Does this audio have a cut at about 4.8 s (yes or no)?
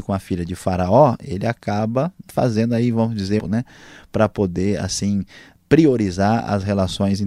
no